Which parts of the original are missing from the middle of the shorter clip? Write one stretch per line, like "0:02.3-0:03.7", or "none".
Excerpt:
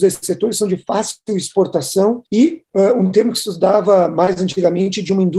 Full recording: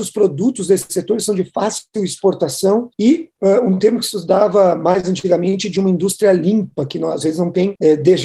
none